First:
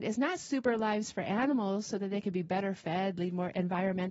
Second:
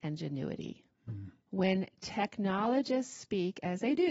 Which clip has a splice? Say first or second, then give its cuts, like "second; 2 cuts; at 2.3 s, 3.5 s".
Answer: second; 1 cut; at 1.4 s